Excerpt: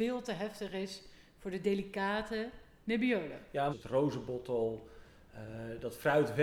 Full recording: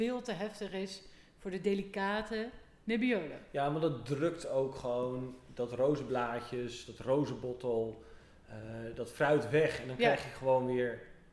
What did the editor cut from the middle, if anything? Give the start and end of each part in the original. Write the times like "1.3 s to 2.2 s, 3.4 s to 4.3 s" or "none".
3.7 s to 6.9 s